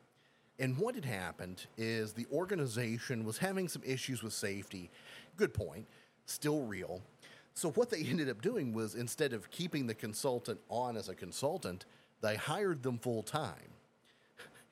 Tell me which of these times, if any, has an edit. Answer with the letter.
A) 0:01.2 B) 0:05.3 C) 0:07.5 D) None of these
B